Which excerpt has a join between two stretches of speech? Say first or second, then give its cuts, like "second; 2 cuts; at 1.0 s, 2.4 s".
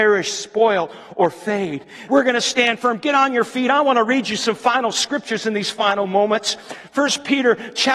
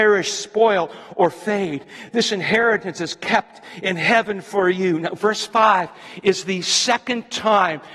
first; 1 cut; at 2.1 s